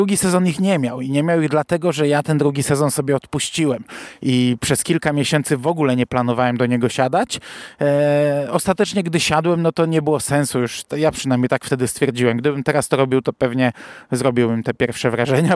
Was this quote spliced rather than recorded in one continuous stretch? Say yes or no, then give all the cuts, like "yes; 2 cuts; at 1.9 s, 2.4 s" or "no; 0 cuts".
no; 0 cuts